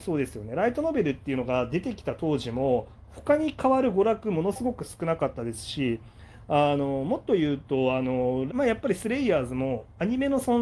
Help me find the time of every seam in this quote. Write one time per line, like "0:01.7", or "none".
0:08.5